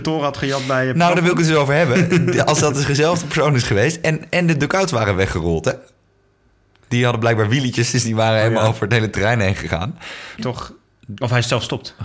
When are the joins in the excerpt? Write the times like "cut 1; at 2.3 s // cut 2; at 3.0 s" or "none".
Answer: cut 1; at 10.4 s